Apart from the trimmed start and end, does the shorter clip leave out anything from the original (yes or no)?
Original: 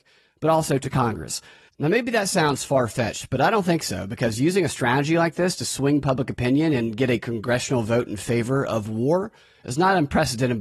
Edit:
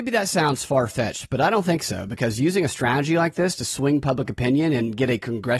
no